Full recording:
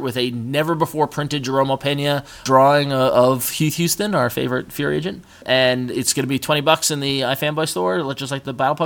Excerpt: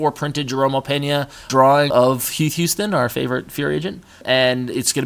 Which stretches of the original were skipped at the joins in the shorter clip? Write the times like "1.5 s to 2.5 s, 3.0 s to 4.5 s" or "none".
2.9 s to 3.1 s